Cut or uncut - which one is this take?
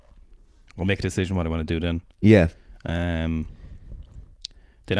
uncut